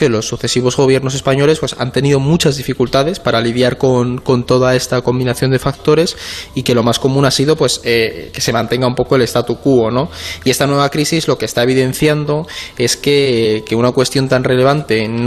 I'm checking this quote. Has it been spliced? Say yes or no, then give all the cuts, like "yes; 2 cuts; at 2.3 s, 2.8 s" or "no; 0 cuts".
no; 0 cuts